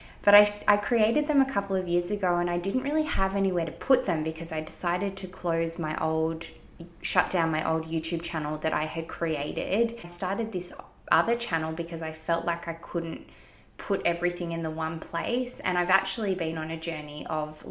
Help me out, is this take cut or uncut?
uncut